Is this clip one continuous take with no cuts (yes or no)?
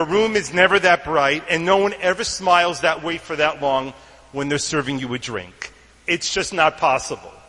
yes